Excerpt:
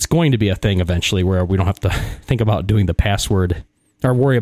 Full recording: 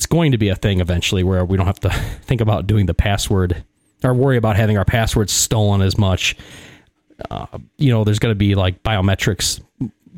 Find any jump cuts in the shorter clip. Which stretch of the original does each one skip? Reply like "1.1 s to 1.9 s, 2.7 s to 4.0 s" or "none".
none